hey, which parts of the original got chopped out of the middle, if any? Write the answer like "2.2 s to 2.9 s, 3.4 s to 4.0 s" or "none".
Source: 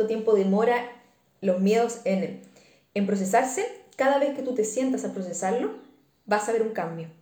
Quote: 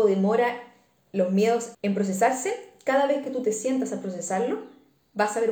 2.0 s to 2.9 s